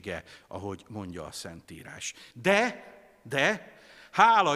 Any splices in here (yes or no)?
no